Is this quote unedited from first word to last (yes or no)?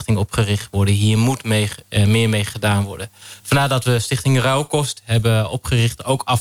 yes